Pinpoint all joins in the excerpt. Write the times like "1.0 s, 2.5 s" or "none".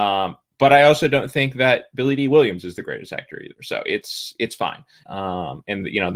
5.0 s